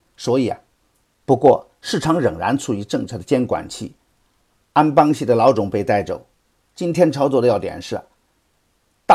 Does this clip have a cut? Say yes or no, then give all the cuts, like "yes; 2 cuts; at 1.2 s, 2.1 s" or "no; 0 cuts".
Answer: yes; 2 cuts; at 1.0 s, 6.5 s